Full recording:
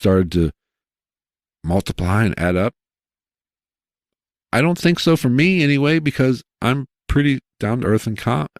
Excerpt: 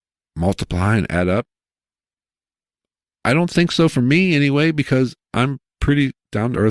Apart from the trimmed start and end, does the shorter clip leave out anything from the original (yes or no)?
no